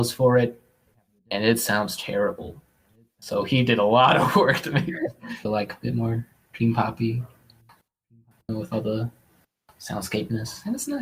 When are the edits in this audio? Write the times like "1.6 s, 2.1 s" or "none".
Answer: 5.4 s